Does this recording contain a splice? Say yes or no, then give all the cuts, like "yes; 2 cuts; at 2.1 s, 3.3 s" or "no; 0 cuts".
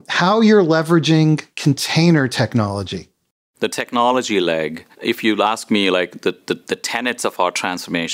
yes; 1 cut; at 4.9 s